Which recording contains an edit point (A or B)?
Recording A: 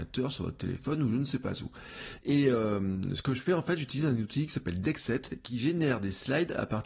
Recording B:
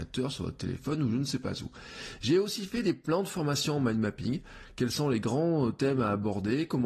A